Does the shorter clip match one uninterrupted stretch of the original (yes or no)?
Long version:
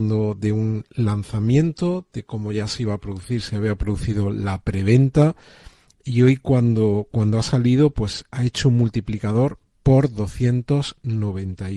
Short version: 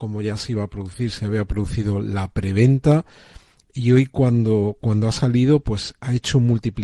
yes